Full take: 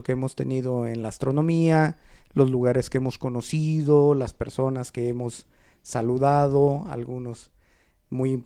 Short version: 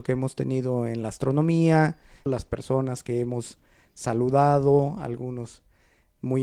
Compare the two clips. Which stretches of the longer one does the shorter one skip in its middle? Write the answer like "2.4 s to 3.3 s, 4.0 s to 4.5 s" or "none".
2.3 s to 4.1 s